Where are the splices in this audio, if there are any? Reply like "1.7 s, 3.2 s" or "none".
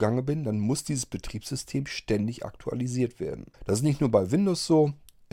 3.5 s